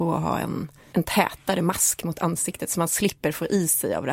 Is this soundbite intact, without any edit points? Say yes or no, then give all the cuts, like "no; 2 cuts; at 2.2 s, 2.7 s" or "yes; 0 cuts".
no; 1 cut; at 0.9 s